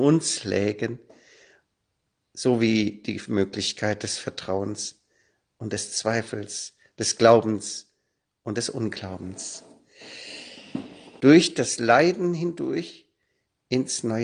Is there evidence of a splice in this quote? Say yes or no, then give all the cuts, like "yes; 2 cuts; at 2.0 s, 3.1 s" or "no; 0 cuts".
yes; 1 cut; at 11.2 s